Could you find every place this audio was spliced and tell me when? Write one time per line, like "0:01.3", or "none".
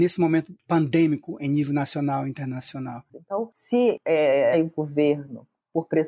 0:03.1
0:04.5